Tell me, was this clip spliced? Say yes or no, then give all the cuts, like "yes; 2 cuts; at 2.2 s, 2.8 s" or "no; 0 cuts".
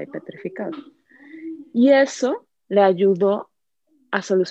no; 0 cuts